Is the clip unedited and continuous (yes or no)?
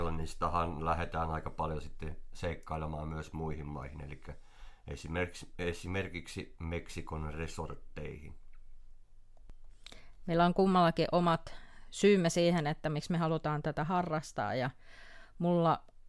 yes